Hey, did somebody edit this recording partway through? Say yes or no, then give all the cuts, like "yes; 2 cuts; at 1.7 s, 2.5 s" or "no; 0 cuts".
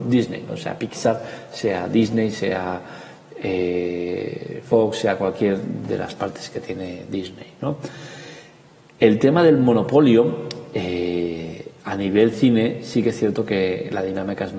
no; 0 cuts